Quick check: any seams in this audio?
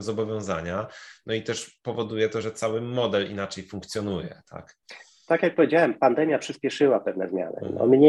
no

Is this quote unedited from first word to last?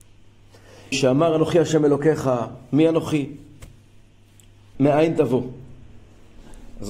no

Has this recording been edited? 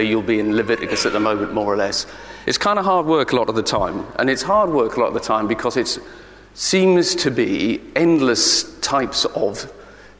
no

